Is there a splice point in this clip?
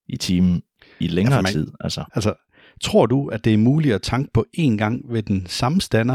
yes; 1 cut; at 2.1 s

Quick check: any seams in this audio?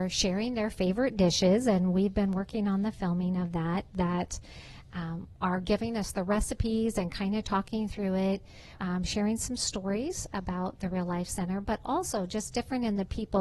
yes; 1 cut; at 8.8 s

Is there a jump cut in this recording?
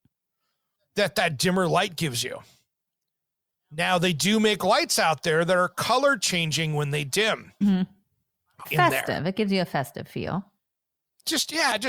yes; 2 cuts; at 7.6 s, 8.6 s

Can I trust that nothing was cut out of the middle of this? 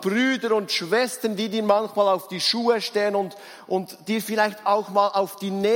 yes; 0 cuts

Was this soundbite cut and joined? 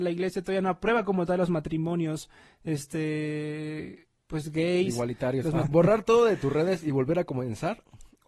yes; 1 cut; at 5.6 s

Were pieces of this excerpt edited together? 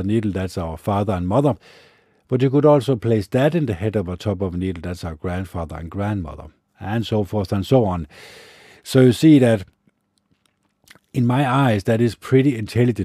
no; 0 cuts

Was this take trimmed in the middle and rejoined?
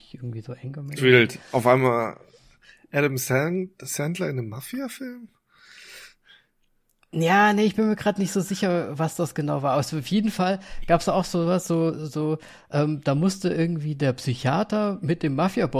yes; 1 cut; at 1.0 s

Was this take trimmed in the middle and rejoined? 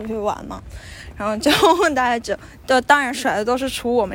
yes; 1 cut; at 1.1 s

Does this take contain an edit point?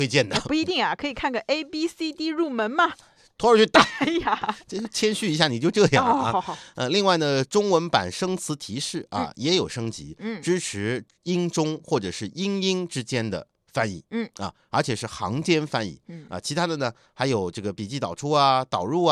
no; 0 cuts

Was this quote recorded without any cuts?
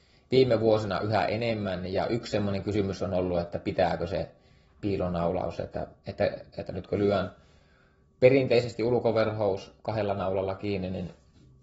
yes; 0 cuts

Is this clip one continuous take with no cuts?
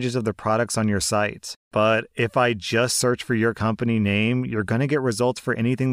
yes; 0 cuts

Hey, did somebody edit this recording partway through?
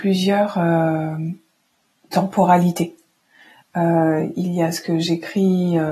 yes; 1 cut; at 3.6 s

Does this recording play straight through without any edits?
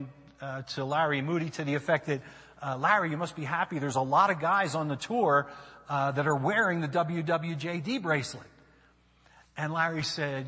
yes; 0 cuts

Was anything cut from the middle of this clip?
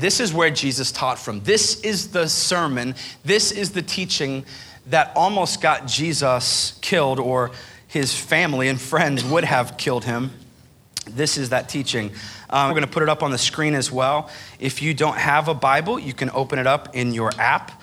yes; 1 cut; at 12.7 s

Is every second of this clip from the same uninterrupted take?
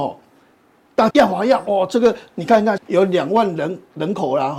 no; 2 cuts; at 1.1 s, 2.8 s

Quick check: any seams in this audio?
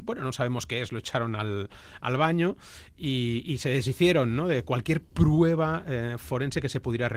no; 0 cuts

